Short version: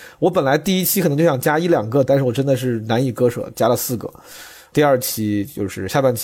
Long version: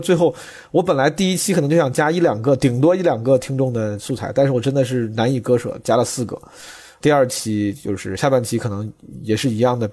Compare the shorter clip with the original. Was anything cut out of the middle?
yes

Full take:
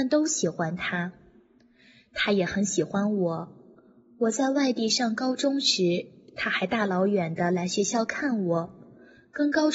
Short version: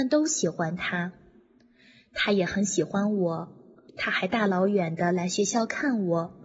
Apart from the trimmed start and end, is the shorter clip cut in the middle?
yes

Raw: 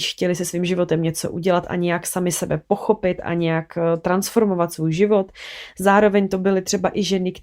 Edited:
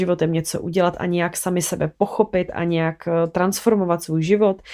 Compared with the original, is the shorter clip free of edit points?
yes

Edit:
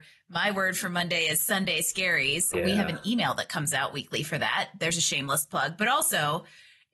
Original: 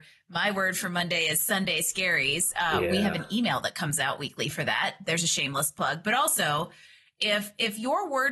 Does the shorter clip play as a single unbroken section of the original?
no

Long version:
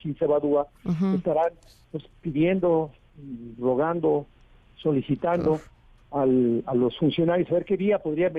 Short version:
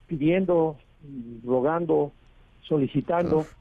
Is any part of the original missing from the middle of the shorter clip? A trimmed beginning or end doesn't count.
no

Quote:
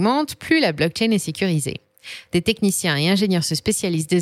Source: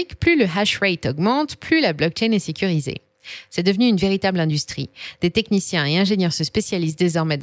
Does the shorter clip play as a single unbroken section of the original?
no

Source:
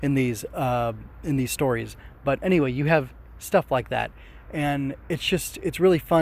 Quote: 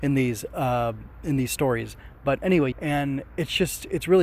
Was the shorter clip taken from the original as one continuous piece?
no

